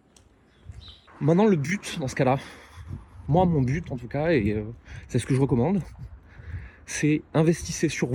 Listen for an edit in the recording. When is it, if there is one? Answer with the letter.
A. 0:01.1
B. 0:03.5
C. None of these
A